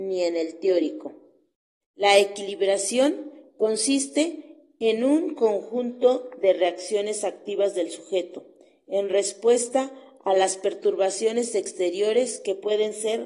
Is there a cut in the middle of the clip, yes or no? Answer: yes